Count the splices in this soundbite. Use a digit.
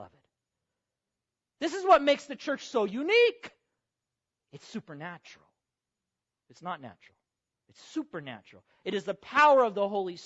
0